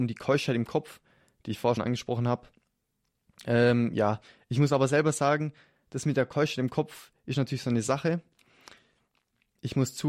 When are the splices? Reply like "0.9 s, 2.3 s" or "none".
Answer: 1.8 s